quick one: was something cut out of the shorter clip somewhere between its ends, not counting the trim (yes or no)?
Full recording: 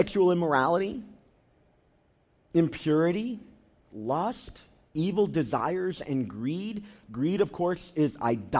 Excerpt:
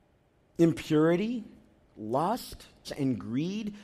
yes